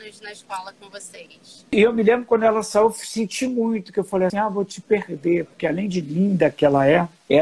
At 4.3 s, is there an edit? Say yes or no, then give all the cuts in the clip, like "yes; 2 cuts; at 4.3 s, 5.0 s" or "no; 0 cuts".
yes; 1 cut; at 4.3 s